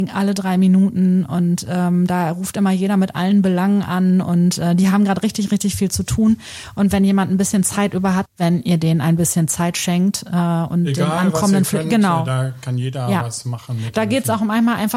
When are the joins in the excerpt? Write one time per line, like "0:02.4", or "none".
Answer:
0:08.3